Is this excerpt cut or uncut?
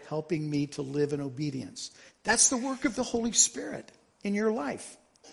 cut